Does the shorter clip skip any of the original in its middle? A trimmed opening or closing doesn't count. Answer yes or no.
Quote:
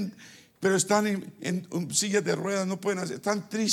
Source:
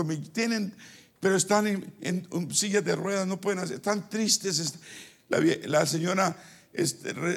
no